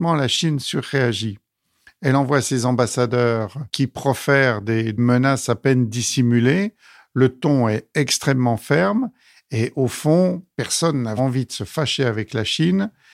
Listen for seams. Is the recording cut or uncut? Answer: cut